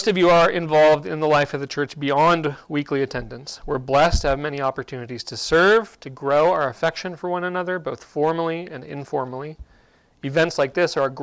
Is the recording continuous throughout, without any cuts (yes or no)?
yes